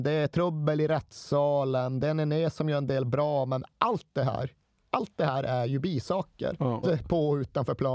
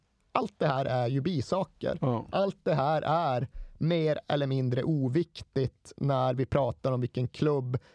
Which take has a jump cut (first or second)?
first